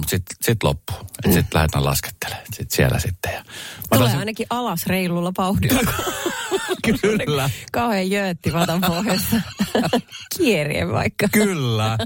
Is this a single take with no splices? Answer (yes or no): yes